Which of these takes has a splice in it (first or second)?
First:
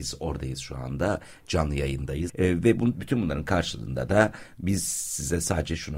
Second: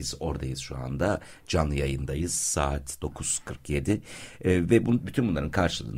first